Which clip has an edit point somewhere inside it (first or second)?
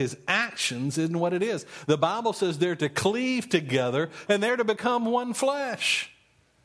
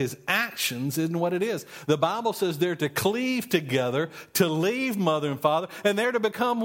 first